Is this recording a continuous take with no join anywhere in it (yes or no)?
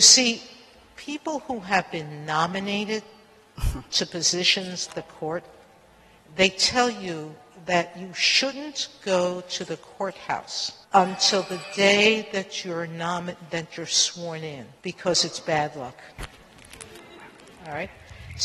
no